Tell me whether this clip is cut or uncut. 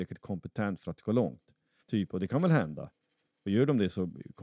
cut